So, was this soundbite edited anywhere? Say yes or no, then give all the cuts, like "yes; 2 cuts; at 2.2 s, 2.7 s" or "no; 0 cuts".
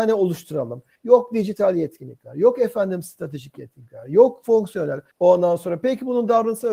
yes; 2 cuts; at 1.0 s, 5.1 s